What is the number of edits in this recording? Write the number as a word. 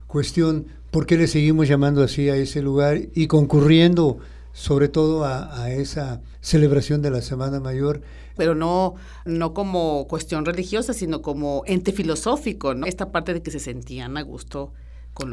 two